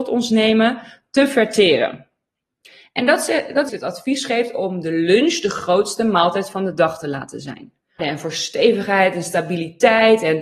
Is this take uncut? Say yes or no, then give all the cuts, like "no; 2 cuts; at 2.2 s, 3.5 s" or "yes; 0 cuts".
no; 2 cuts; at 3.7 s, 8.0 s